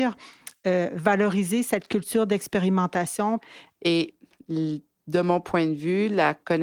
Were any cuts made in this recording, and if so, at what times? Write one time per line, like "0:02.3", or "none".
0:03.8